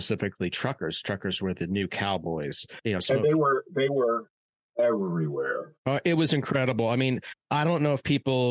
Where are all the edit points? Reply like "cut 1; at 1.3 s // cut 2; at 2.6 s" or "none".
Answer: cut 1; at 5.8 s